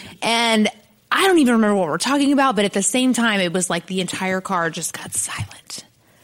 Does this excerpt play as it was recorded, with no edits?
yes; 0 cuts

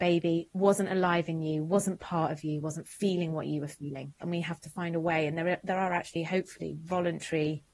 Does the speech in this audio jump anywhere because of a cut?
yes; 1 cut; at 4.2 s

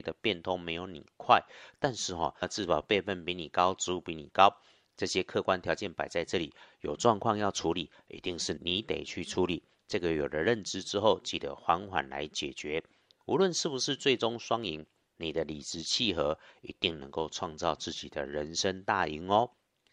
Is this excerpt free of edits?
no; 1 cut; at 2.4 s

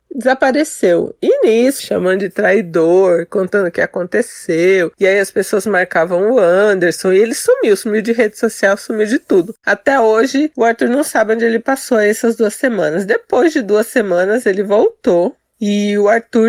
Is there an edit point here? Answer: yes; 1 cut; at 1.8 s

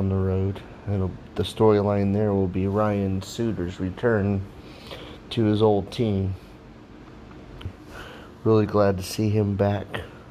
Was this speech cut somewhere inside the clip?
yes; 1 cut; at 7.7 s

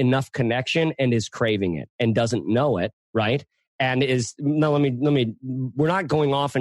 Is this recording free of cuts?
no; 1 cut; at 3.0 s

